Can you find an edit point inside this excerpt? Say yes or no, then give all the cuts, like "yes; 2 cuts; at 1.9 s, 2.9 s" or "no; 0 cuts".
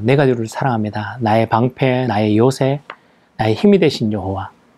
yes; 1 cut; at 2.1 s